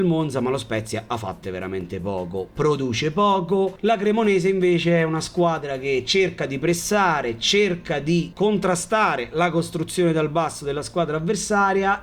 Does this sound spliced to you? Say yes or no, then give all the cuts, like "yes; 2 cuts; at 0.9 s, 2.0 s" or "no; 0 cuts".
yes; 1 cut; at 1.4 s